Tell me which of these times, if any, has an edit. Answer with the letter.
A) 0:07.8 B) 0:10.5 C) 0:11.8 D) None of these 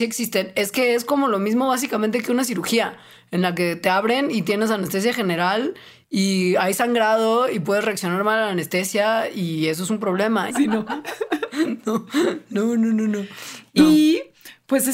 B